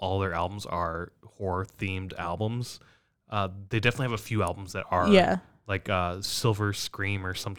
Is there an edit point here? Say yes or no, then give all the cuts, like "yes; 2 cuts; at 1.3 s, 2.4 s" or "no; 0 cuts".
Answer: no; 0 cuts